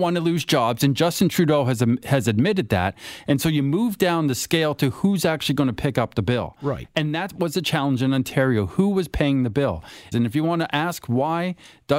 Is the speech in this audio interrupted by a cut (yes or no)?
yes